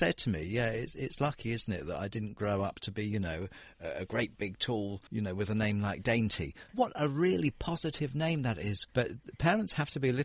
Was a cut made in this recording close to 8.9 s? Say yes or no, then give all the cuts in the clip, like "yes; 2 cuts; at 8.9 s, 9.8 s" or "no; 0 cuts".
yes; 3 cuts; at 5.1 s, 6.7 s, 8.9 s